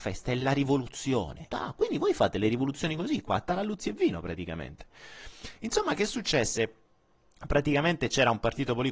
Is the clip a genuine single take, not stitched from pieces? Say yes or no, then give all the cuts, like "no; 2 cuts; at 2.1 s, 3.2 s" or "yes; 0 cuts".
no; 1 cut; at 1.5 s